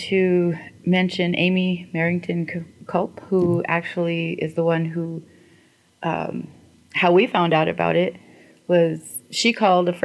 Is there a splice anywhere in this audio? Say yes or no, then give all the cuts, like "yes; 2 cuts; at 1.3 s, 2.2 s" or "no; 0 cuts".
no; 0 cuts